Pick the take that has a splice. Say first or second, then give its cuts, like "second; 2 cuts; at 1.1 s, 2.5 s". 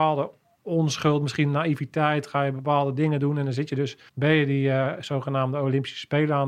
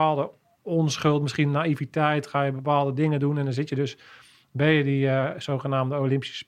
first; 1 cut; at 4.1 s